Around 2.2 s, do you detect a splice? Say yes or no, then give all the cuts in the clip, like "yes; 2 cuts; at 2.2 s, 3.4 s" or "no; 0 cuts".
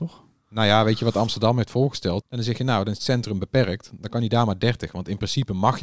yes; 1 cut; at 2.2 s